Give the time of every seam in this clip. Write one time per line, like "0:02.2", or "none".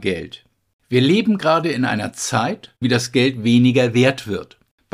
0:02.8